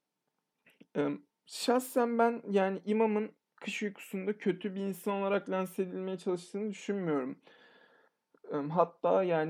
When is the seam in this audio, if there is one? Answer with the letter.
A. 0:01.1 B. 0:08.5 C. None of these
C